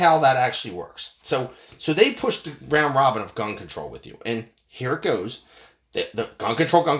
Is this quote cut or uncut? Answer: cut